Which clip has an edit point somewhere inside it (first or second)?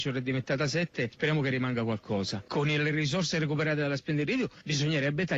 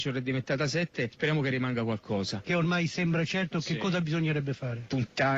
second